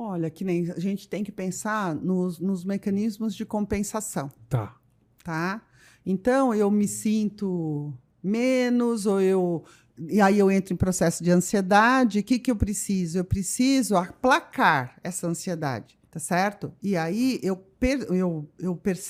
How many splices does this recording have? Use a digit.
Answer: 1